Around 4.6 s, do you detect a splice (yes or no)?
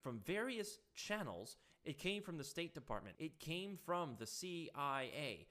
no